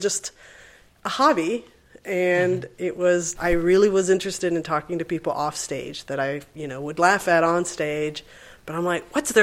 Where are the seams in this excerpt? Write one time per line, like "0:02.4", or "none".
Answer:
0:03.4